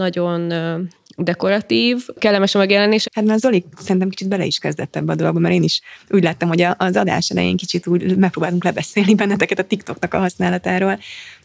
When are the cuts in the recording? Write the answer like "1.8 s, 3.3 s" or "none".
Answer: 3.0 s

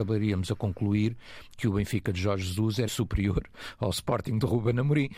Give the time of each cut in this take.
2.9 s

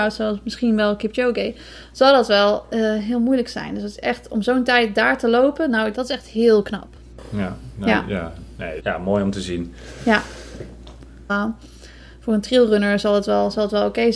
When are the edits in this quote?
8.8 s, 11.3 s

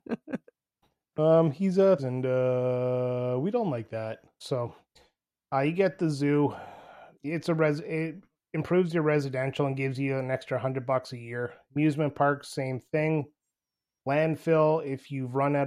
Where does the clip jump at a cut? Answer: 2.0 s, 4.4 s

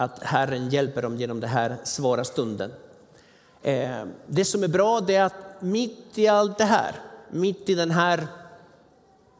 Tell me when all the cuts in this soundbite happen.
none

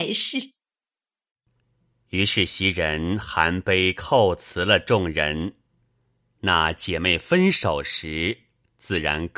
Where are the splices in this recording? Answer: none

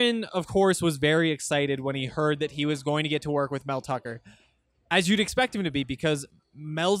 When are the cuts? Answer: none

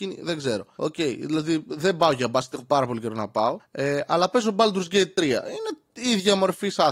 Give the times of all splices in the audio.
none

